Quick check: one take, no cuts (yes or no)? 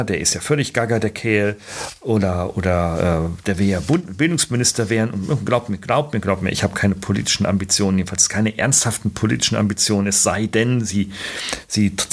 yes